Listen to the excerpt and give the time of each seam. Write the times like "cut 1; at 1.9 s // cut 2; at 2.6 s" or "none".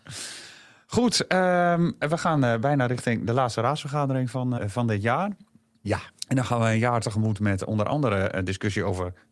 cut 1; at 4.6 s